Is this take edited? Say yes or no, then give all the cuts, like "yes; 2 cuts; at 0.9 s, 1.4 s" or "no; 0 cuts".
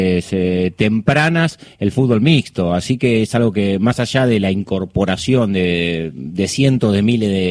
no; 0 cuts